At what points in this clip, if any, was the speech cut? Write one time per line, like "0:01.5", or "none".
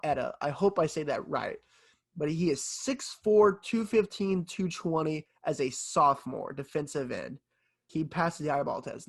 0:07.9